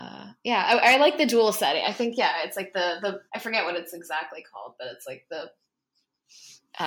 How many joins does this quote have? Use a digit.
1